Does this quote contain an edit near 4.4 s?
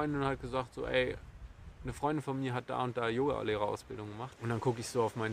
yes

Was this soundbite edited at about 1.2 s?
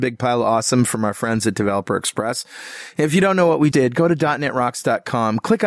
no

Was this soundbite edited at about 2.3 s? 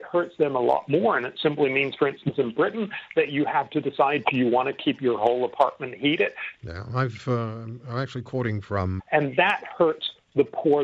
no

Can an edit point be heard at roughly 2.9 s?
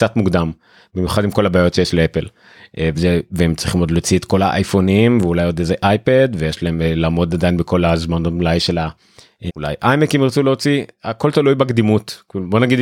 yes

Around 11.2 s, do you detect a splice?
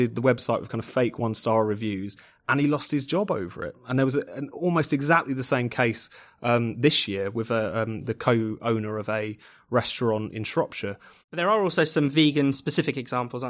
yes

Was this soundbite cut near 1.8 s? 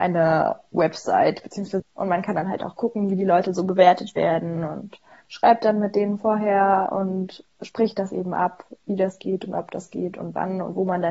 yes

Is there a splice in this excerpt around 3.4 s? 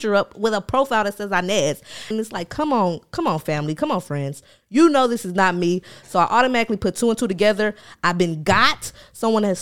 no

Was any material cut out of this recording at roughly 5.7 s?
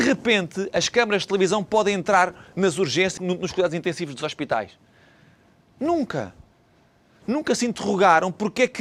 no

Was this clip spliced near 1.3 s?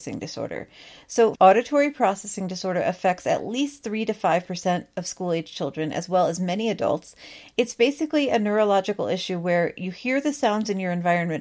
yes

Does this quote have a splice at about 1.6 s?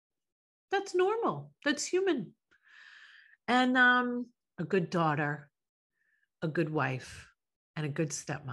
no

